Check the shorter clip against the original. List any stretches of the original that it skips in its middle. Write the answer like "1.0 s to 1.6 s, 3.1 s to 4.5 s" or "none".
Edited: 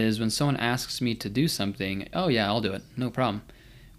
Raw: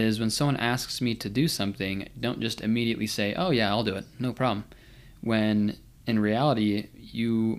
2.1 s to 3.4 s